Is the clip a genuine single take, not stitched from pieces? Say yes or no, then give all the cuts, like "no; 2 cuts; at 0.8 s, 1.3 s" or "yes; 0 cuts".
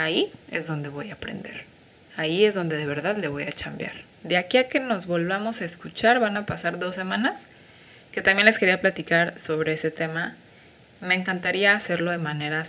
no; 1 cut; at 4.2 s